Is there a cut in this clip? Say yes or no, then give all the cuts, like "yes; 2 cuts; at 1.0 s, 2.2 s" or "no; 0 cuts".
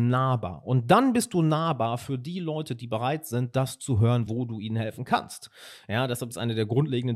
yes; 1 cut; at 4.3 s